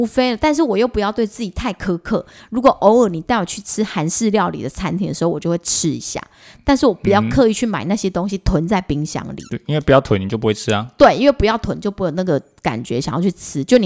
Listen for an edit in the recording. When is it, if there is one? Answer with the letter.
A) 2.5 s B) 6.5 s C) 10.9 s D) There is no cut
D